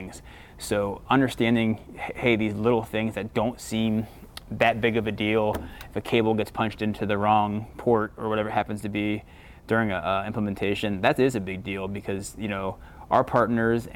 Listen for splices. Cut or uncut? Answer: uncut